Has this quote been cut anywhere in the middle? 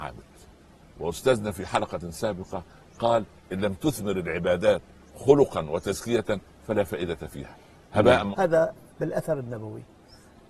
yes; 1 cut; at 8.3 s

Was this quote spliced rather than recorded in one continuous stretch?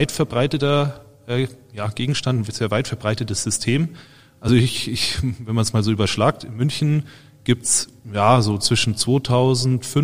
no; 0 cuts

